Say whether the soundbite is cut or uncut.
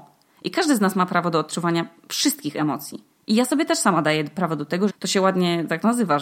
cut